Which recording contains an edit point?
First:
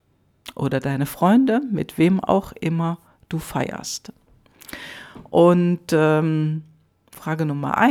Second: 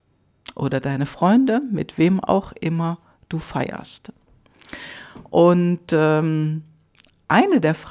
first; 1 cut; at 6.9 s

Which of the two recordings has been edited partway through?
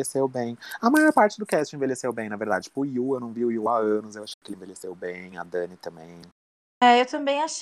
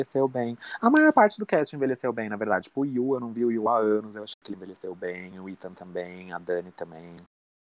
first; 1 cut; at 5.3 s

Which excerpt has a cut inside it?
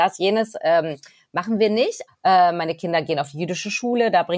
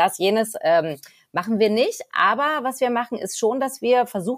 first; 1 cut; at 2.1 s

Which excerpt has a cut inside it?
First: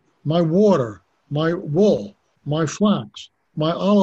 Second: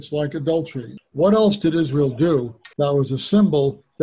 second; 2 cuts; at 1.0 s, 2.7 s

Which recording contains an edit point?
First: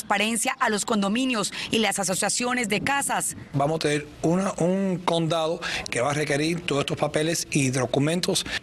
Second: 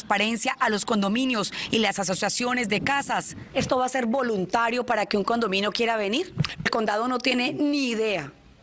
second; 2 cuts; at 3.5 s, 6.6 s

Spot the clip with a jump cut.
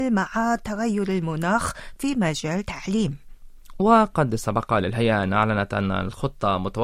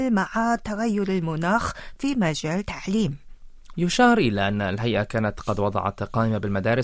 second; 1 cut; at 3.7 s

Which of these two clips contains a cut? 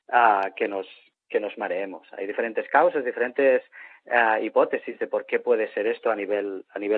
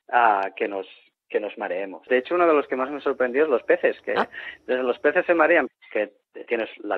second; 2 cuts; at 2.1 s, 5.7 s

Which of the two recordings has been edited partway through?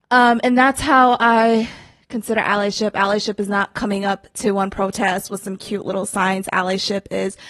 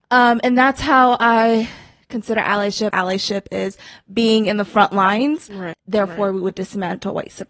second; 2 cuts; at 2.9 s, 5.7 s

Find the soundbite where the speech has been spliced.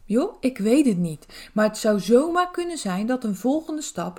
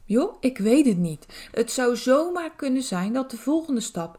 second; 1 cut; at 1.5 s

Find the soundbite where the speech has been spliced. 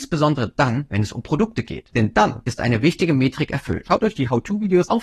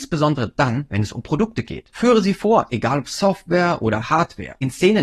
first; 2 cuts; at 1.9 s, 3.8 s

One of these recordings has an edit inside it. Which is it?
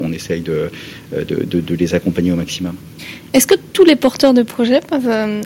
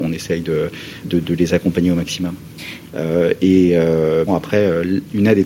second; 3 cuts; at 1.0 s, 2.9 s, 4.3 s

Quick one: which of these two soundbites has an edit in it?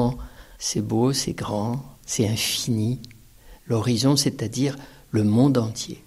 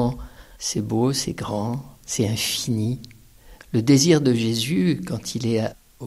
first; 1 cut; at 3.6 s

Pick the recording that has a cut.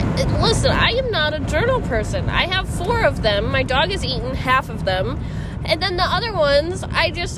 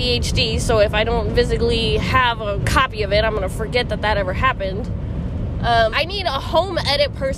second; 1 cut; at 5.9 s

